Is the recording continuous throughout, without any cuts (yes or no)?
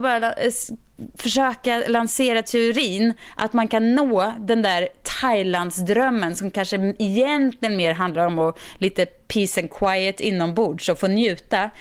yes